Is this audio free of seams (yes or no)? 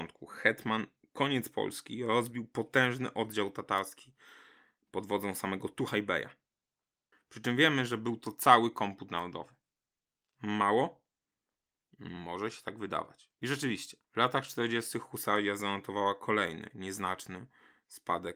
no